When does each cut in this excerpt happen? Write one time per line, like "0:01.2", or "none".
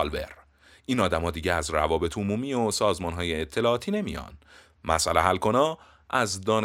none